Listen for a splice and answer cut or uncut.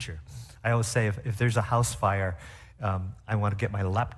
uncut